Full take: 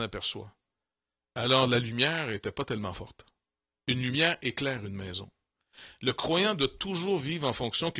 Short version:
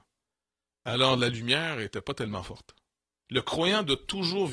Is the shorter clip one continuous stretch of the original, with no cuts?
no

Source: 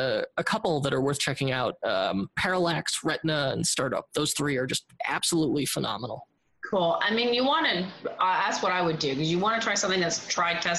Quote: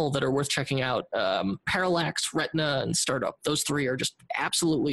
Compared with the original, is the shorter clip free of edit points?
yes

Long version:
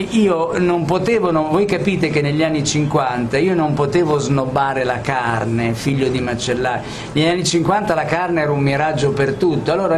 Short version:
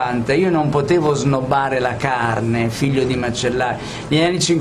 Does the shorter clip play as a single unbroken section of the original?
yes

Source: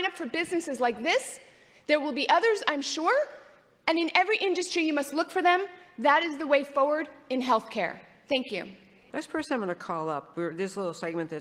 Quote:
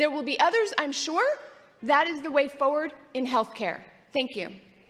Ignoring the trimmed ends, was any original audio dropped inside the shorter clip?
yes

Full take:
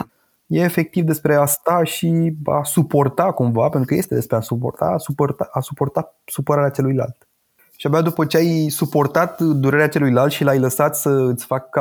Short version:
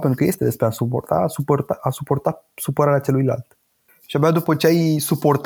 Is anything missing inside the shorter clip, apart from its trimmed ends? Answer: no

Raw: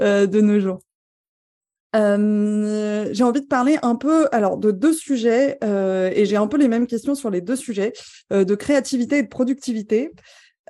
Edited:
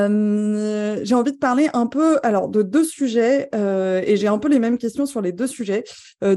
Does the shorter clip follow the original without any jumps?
yes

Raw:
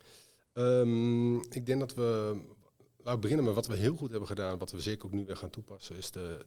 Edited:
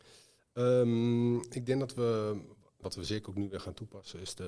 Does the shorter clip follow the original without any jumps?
no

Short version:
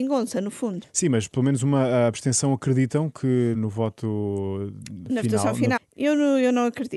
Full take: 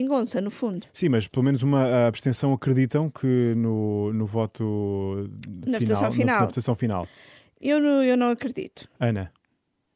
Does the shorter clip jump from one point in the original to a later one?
yes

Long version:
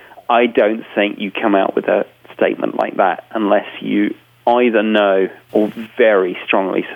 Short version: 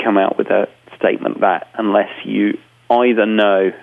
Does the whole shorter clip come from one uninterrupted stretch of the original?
no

